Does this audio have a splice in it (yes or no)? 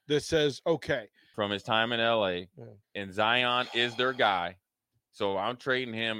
yes